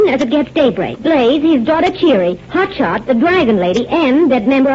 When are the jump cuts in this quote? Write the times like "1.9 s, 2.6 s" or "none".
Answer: 0.9 s